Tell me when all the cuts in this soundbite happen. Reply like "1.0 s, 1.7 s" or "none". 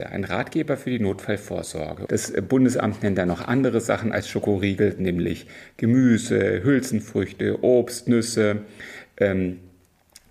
2.1 s